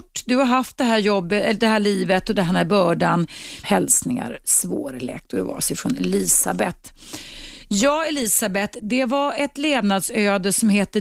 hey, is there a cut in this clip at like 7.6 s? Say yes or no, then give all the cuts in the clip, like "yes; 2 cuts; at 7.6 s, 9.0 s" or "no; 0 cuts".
no; 1 cut; at 3.6 s